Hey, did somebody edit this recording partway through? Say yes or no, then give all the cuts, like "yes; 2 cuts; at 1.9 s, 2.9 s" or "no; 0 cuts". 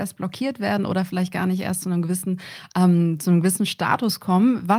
no; 0 cuts